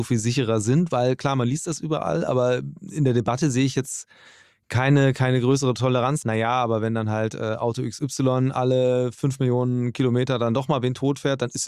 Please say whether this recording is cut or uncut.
cut